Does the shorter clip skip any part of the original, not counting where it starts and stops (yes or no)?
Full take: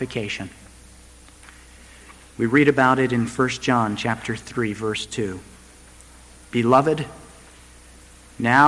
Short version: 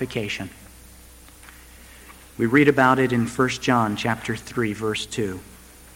no